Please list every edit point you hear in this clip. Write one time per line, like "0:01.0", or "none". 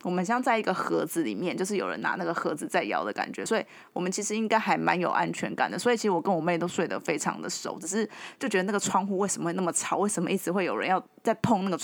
none